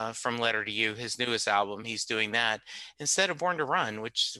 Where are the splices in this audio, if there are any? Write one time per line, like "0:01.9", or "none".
none